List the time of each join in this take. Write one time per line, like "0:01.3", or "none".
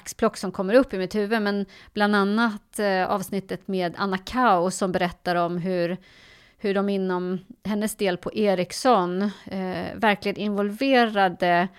none